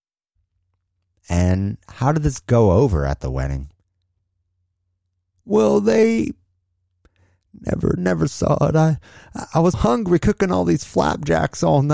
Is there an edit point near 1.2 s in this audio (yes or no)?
no